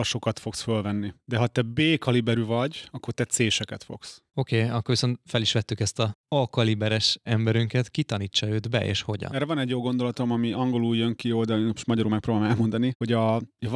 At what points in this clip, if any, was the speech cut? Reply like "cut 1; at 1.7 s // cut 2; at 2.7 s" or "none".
cut 1; at 4.3 s // cut 2; at 9.3 s